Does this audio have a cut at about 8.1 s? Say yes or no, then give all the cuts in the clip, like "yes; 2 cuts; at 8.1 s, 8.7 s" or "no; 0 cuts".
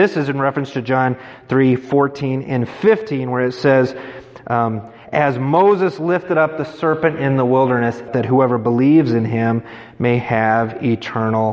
yes; 1 cut; at 8.1 s